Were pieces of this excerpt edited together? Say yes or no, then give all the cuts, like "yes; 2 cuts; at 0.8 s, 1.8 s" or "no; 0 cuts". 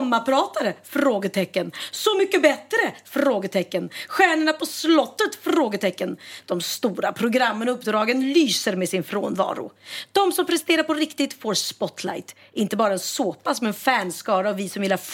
no; 0 cuts